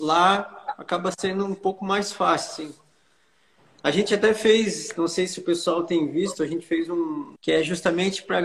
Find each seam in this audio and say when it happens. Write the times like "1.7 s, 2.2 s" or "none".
7.4 s

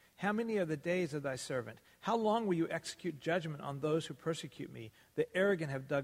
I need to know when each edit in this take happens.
none

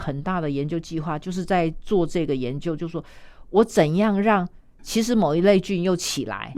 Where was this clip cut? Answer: 4.8 s

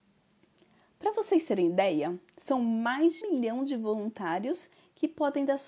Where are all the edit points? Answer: 3.2 s

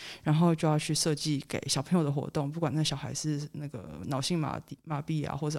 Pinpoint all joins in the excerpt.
none

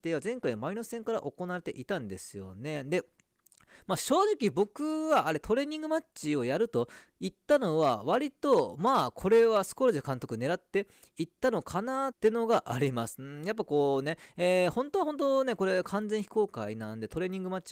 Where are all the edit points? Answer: 12.1 s

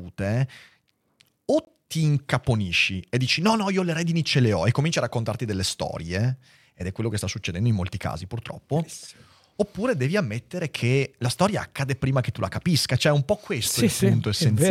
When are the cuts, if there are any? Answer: none

